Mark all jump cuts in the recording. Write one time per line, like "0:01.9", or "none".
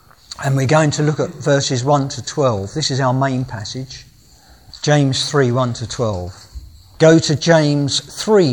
0:07.0